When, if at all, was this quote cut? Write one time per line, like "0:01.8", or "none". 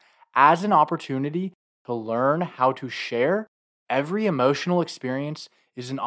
0:03.8